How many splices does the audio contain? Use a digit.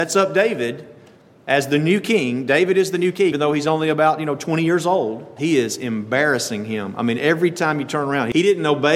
2